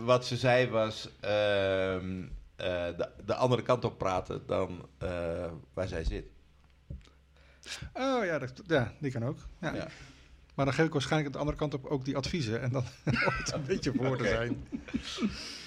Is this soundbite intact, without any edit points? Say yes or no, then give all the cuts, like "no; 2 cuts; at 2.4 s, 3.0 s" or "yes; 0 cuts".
yes; 0 cuts